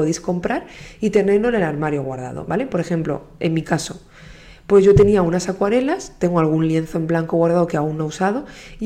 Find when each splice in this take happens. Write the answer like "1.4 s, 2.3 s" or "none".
none